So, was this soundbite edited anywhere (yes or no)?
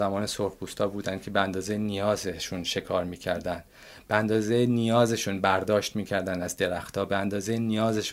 no